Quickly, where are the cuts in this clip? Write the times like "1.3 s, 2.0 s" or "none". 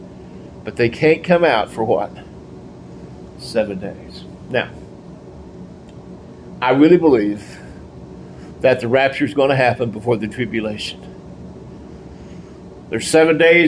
none